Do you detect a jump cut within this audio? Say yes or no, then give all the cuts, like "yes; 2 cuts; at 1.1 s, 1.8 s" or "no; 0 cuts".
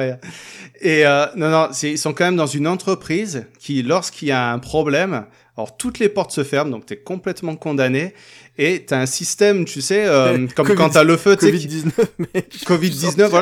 no; 0 cuts